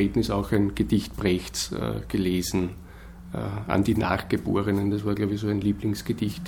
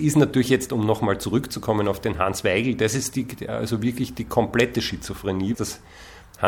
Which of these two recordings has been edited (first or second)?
second